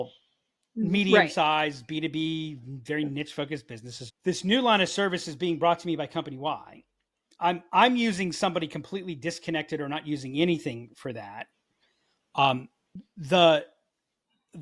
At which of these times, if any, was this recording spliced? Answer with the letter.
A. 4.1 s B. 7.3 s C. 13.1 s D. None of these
A